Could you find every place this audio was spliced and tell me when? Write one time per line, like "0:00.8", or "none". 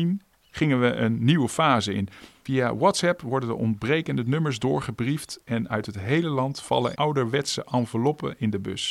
0:06.9